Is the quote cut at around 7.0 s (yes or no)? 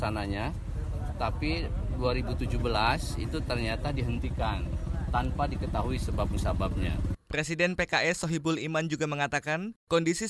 no